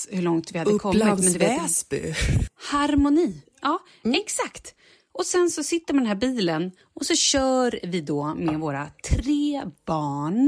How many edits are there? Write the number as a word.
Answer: one